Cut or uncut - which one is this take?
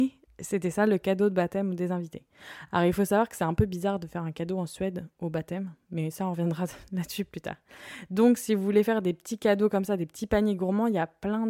uncut